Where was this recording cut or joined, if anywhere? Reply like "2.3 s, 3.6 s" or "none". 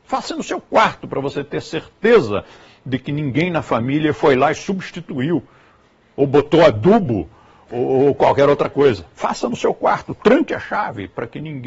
none